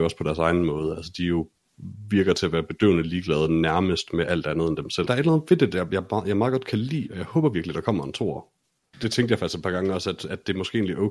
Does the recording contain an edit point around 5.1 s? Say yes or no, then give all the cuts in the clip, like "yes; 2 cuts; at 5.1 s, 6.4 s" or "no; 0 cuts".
yes; 2 cuts; at 5.1 s, 8.9 s